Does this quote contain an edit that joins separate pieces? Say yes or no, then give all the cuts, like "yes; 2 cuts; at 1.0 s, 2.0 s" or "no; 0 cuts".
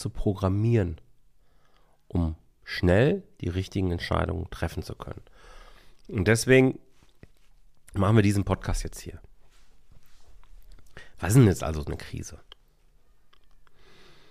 no; 0 cuts